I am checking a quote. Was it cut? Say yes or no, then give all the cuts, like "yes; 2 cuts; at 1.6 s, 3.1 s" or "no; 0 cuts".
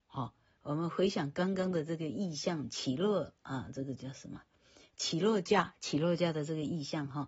no; 0 cuts